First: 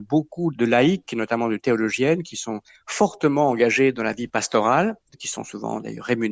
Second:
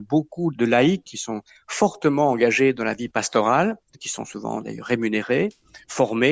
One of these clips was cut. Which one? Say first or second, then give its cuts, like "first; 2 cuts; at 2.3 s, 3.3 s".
second; 1 cut; at 1.1 s